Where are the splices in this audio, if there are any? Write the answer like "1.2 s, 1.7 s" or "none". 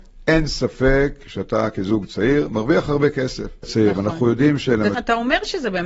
3.6 s, 4.9 s